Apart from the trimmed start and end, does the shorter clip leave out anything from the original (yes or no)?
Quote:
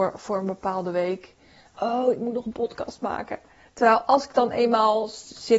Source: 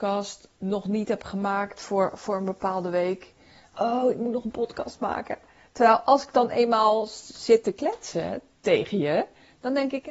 no